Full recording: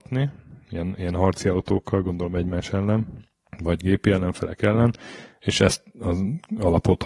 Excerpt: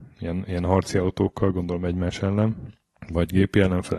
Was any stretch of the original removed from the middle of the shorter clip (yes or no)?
no